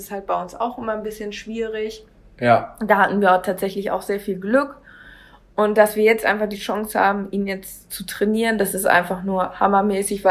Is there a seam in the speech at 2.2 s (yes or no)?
no